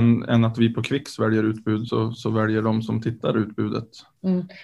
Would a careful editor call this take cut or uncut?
uncut